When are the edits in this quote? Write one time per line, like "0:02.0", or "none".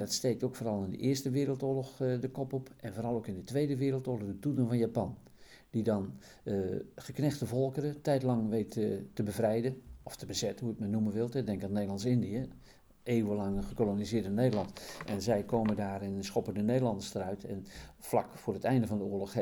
none